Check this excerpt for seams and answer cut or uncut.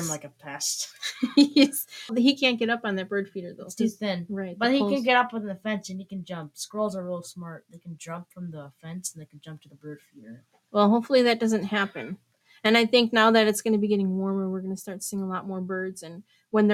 cut